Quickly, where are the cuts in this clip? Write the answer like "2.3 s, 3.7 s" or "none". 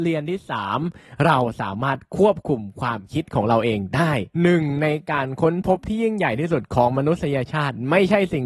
4.3 s